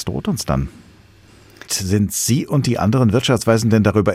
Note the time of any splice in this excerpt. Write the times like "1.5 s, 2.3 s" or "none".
1.7 s